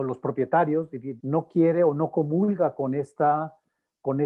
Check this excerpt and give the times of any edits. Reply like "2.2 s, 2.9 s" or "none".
1.2 s